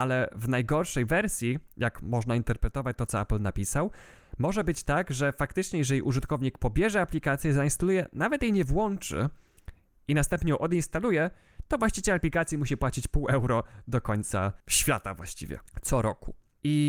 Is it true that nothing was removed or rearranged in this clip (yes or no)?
yes